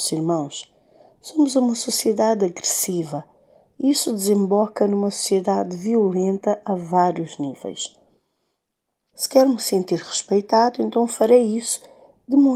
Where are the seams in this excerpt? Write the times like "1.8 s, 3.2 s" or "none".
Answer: 9.1 s